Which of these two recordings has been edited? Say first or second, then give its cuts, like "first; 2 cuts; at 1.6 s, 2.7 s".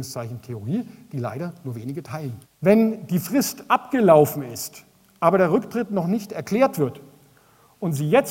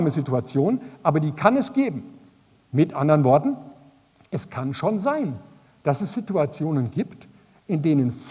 first; 1 cut; at 2.4 s